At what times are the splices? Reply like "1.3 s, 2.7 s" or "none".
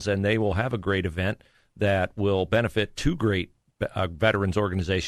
none